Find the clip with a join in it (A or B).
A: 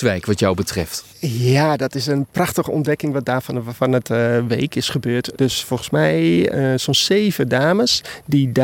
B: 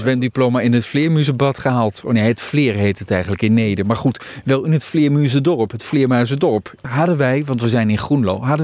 A